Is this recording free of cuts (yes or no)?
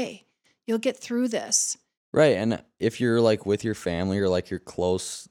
yes